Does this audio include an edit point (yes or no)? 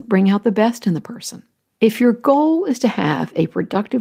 yes